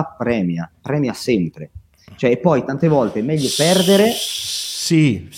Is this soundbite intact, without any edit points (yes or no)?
yes